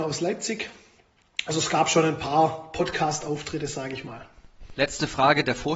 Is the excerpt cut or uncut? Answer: uncut